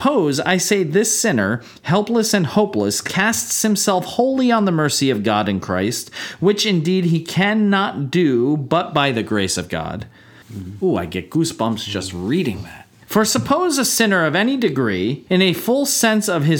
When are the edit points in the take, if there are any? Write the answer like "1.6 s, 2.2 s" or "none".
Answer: 10.4 s, 13.0 s, 15.3 s